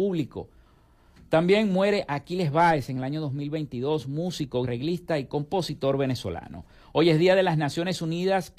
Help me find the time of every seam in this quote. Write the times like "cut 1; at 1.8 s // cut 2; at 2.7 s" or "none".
cut 1; at 4.6 s

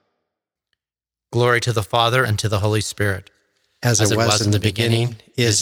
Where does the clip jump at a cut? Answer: cut 1; at 2.2 s

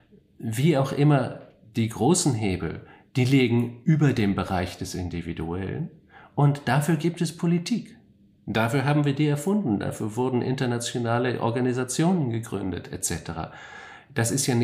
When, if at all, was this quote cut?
none

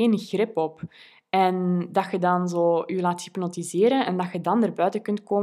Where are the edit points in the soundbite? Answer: none

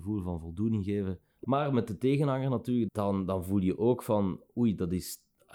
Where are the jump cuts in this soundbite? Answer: cut 1; at 1.4 s // cut 2; at 2.9 s

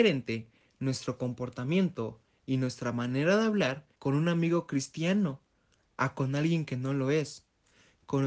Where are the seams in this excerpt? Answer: cut 1; at 3.9 s

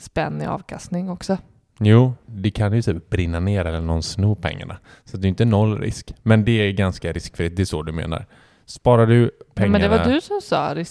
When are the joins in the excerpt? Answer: cut 1; at 2.2 s

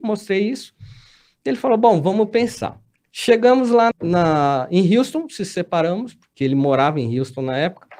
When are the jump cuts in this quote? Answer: cut 1; at 3.9 s

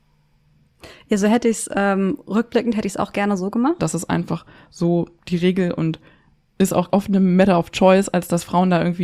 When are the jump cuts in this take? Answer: cut 1; at 3.8 s // cut 2; at 6.9 s

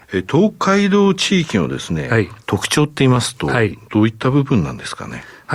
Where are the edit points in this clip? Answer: cut 1; at 2.4 s

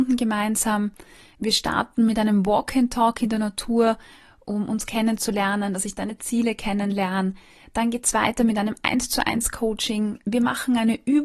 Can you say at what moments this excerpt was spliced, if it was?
none

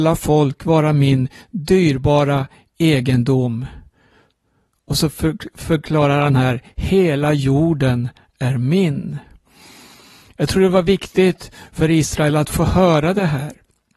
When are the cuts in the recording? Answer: none

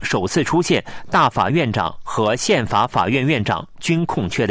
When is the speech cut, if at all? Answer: cut 1; at 1.5 s

